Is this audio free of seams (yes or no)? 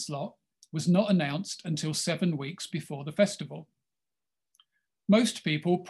yes